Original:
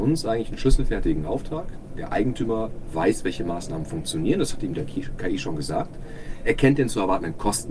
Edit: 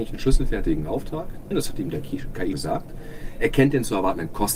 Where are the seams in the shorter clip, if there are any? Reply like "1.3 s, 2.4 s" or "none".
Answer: 1.5 s, 2.5 s